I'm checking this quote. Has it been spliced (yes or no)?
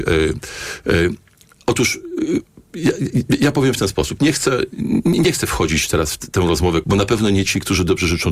yes